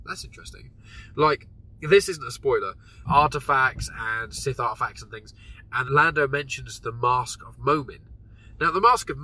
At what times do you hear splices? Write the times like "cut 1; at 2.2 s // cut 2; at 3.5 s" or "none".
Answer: cut 1; at 3.0 s // cut 2; at 5.8 s